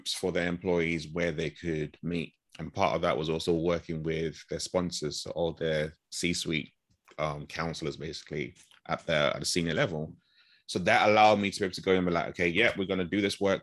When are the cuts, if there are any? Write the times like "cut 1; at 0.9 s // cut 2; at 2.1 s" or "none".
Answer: none